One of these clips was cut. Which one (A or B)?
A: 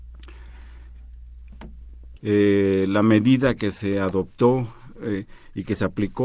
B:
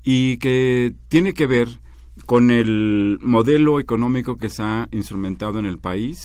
A